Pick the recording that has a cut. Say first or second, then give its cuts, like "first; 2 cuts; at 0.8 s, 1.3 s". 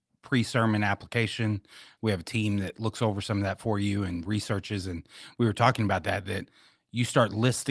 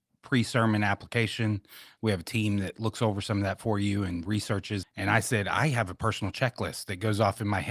second; 1 cut; at 4.8 s